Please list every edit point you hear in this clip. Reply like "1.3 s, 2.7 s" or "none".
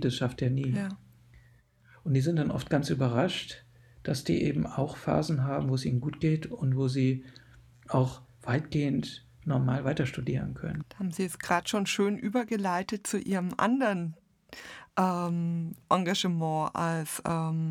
10.8 s